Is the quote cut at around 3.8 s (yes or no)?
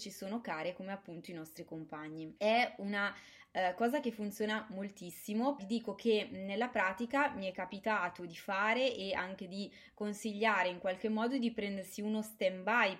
no